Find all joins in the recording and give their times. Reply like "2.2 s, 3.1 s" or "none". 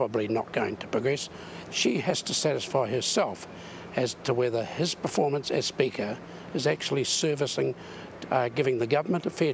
1.7 s, 8.2 s